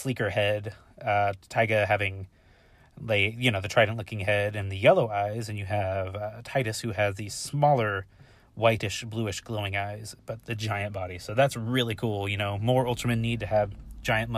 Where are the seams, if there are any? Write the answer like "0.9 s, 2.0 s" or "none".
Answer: none